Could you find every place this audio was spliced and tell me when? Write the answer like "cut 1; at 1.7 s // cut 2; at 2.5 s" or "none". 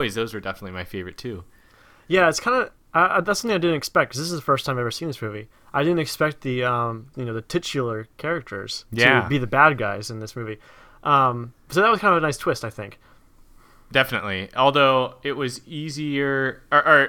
cut 1; at 7.1 s